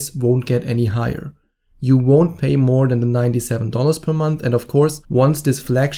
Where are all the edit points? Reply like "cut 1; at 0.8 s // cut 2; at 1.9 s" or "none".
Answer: cut 1; at 5.0 s